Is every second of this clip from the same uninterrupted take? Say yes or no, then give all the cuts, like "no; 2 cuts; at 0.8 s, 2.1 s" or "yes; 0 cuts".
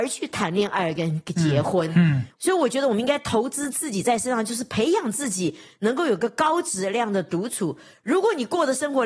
yes; 0 cuts